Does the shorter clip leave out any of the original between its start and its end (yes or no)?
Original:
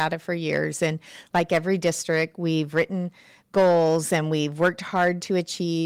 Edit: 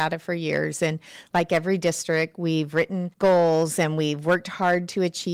yes